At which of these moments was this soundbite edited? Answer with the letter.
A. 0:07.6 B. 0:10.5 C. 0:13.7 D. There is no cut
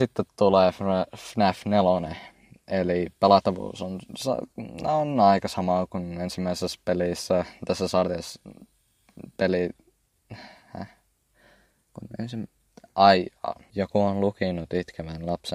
C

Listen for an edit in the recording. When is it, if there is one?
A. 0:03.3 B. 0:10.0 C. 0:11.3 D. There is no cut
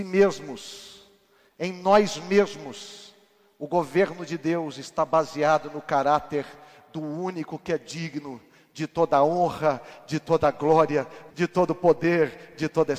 C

